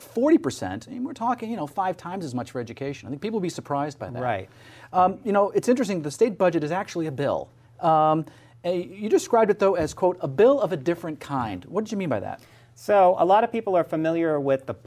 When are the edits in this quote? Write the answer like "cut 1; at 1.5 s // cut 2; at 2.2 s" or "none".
none